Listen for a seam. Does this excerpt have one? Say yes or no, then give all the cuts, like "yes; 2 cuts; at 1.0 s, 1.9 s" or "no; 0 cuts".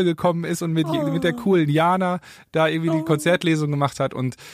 no; 0 cuts